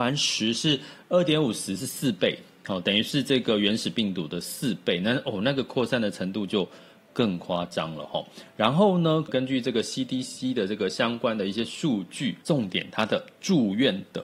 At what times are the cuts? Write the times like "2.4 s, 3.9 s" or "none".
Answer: 9.3 s, 12.4 s